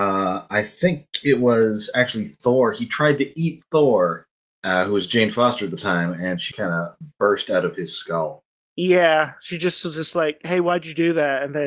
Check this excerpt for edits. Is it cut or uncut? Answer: cut